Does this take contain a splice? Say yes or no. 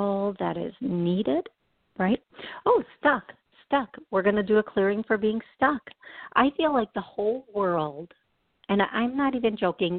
yes